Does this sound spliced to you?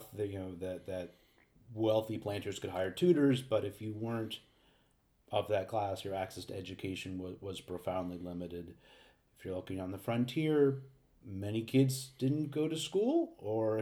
no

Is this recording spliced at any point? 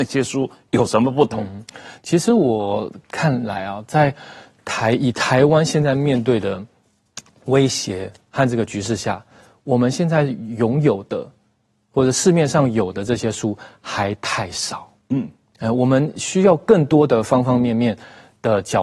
no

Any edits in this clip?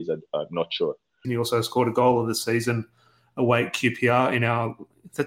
yes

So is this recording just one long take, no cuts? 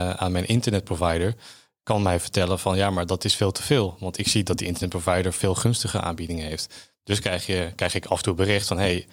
yes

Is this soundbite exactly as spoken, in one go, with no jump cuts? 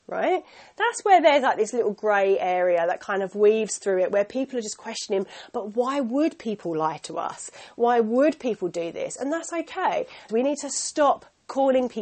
no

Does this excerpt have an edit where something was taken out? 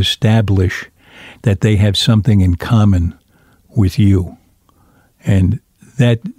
no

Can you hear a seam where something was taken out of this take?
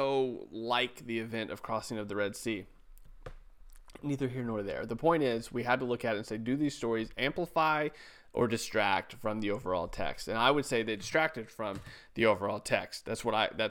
no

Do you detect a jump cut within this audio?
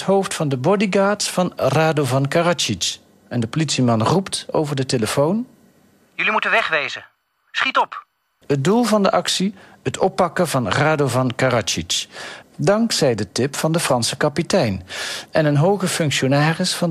yes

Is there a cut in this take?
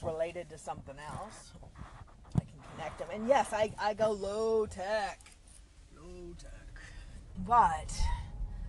yes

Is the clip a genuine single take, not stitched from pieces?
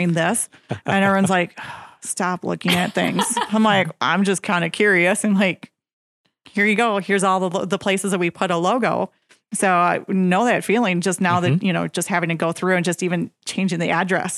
yes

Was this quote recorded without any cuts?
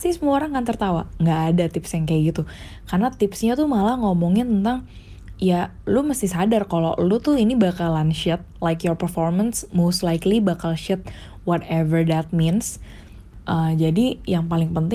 yes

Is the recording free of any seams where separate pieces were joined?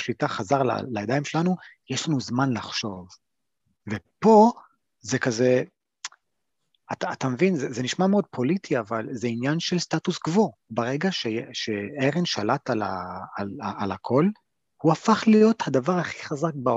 yes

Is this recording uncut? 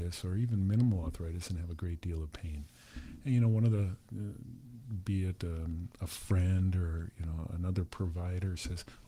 yes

